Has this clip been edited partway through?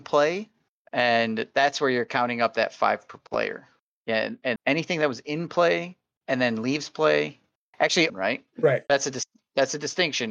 yes; 2 cuts; at 4.6 s, 8.1 s

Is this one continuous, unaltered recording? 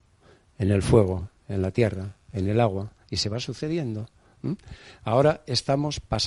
yes; 0 cuts

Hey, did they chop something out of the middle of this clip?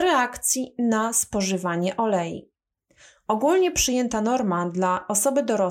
no; 0 cuts

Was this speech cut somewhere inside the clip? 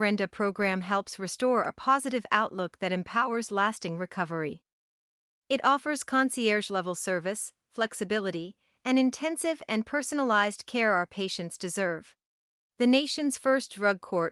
yes; 1 cut; at 12.6 s

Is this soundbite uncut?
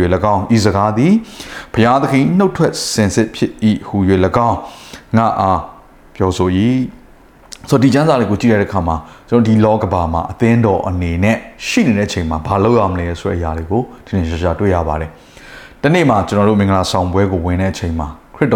no; 1 cut; at 9.8 s

